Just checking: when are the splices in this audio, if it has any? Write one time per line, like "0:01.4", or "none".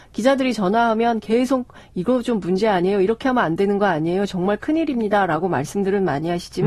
none